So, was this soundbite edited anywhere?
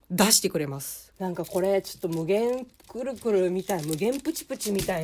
yes; 1 cut; at 1.1 s

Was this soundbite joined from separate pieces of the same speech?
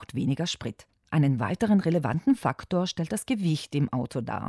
no; 0 cuts

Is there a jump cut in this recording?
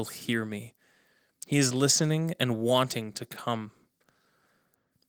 no; 0 cuts

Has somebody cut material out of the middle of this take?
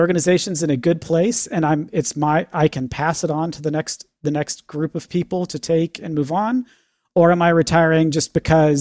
no; 0 cuts

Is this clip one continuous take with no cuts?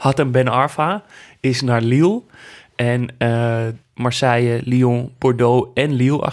no; 1 cut; at 3.8 s

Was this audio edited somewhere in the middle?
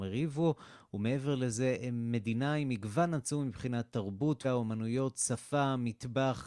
yes; 1 cut; at 4.4 s

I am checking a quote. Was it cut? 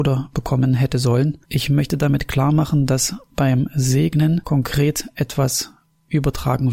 yes; 1 cut; at 1.4 s

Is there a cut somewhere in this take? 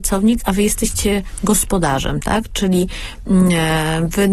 no; 0 cuts

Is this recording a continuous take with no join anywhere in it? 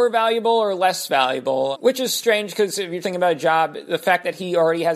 no; 2 cuts; at 1.7 s, 3.0 s

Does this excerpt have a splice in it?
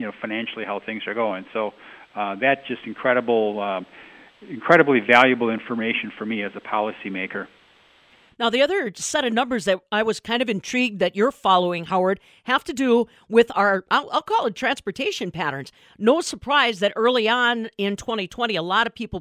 no; 0 cuts

